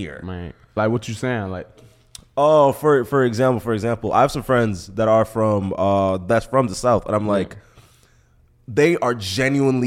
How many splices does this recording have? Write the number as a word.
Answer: one